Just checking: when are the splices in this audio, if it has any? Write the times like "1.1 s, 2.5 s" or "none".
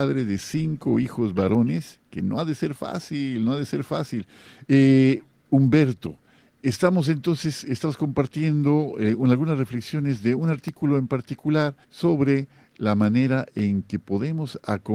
4.6 s, 11.8 s